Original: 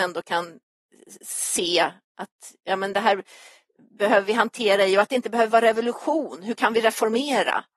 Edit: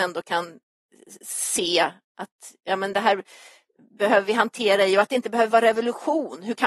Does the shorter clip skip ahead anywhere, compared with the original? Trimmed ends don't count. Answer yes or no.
no